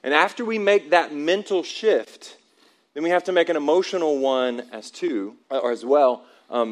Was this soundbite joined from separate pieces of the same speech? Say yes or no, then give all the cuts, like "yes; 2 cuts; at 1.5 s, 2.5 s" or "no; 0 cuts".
yes; 1 cut; at 5.4 s